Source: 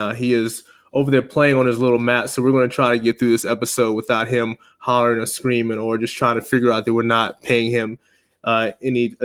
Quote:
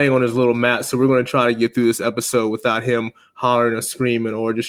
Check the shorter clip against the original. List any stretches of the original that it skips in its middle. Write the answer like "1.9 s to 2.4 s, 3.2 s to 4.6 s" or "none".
none